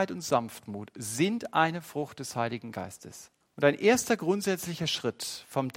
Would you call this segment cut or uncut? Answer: cut